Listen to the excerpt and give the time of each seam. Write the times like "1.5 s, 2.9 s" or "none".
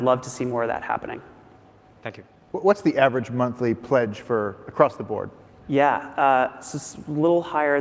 none

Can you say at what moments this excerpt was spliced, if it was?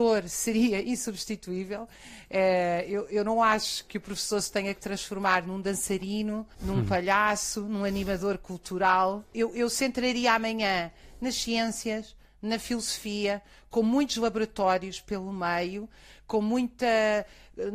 none

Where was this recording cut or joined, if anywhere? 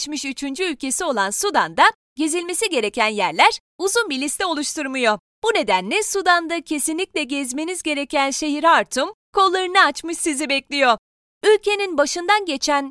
5.3 s, 11.2 s

